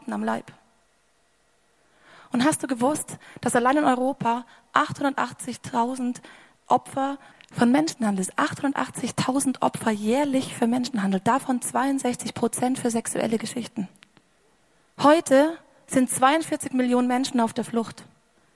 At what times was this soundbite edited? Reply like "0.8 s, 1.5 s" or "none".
14.8 s